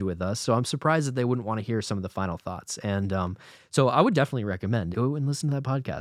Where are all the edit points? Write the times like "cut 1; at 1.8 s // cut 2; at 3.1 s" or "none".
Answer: cut 1; at 4.9 s